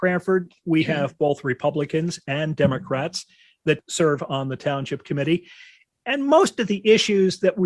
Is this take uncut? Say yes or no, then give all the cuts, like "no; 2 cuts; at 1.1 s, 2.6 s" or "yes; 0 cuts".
yes; 0 cuts